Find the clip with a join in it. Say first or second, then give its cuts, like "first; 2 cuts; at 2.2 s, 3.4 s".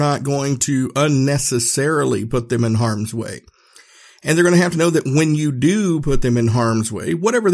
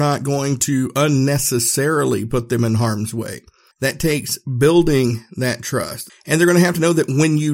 second; 2 cuts; at 3.7 s, 6.1 s